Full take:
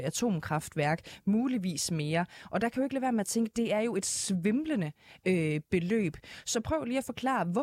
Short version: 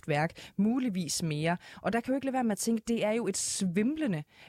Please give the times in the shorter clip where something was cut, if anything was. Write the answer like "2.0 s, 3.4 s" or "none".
none